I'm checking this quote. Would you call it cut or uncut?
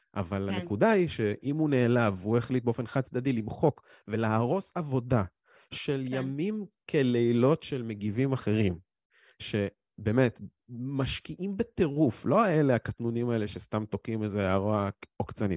uncut